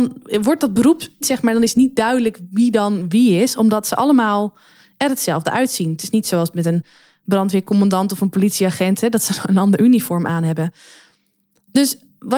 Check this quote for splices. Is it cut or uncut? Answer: cut